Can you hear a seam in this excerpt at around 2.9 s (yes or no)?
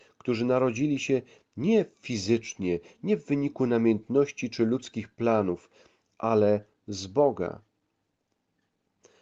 no